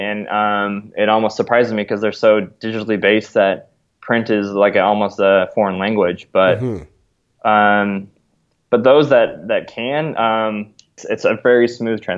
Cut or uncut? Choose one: cut